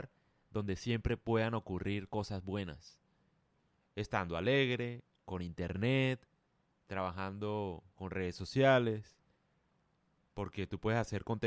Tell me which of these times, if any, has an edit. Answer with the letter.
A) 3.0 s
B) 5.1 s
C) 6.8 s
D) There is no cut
B